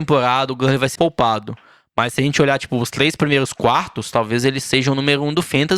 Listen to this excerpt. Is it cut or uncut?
cut